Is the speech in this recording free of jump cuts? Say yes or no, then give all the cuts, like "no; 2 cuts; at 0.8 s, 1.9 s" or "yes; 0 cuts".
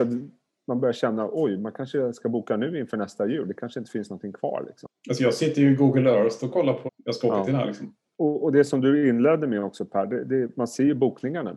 no; 2 cuts; at 6.9 s, 8.1 s